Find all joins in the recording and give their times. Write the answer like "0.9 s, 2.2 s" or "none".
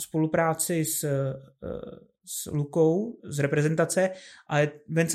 3.2 s